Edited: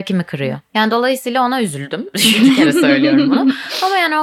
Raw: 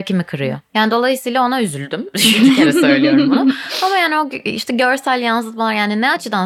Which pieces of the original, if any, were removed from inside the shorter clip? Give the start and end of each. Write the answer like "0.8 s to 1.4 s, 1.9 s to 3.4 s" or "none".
none